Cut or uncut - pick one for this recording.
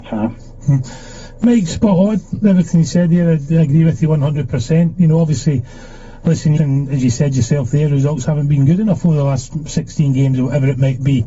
cut